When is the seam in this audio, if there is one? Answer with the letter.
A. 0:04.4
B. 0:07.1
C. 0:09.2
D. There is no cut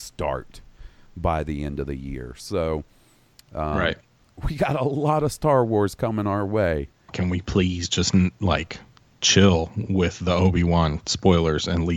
B